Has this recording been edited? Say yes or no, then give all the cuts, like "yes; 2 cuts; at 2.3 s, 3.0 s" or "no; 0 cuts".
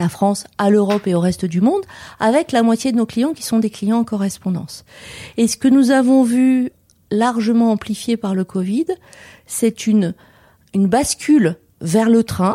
no; 0 cuts